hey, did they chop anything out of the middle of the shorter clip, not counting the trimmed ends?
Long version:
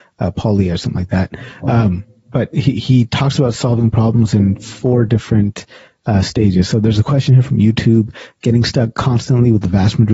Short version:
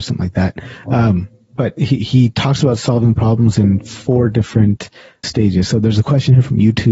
yes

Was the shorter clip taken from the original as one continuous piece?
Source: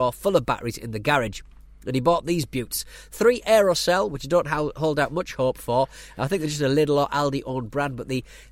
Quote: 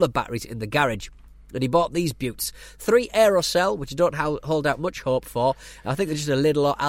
yes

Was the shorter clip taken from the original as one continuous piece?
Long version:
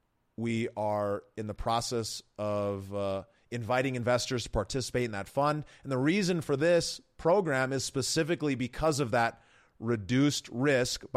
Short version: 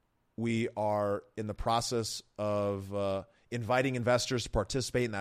yes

